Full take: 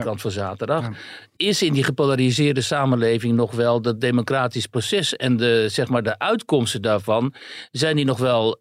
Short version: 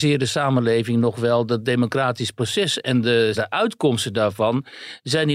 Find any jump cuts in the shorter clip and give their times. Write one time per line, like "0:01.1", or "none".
0:03.3